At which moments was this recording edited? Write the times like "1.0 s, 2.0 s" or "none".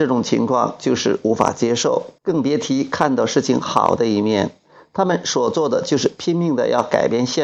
2.2 s